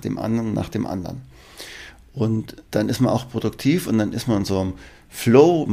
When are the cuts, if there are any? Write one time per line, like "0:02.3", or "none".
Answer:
0:02.7